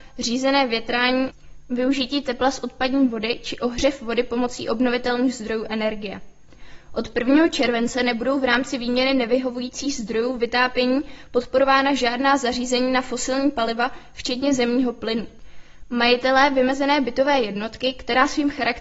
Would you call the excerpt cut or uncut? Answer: uncut